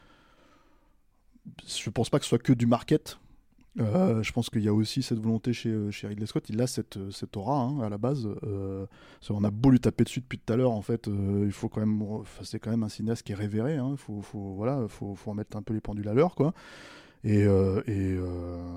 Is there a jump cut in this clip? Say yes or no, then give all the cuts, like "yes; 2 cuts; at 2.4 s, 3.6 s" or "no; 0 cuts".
no; 0 cuts